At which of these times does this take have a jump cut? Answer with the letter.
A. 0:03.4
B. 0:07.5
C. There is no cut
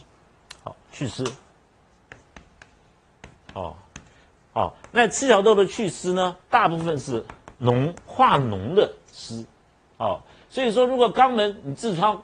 B